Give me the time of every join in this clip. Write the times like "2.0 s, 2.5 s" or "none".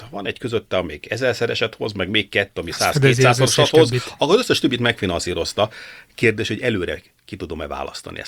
none